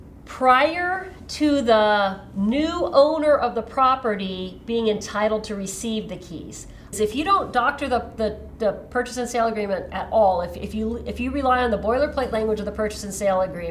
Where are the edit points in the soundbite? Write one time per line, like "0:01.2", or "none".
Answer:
0:06.9